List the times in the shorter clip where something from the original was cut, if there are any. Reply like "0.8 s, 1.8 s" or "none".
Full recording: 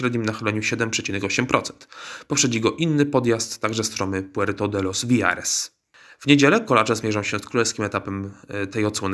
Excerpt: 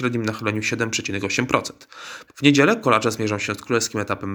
2.3 s